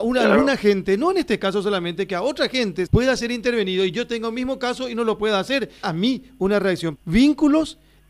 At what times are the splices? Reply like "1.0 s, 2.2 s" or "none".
2.9 s, 5.8 s, 7.0 s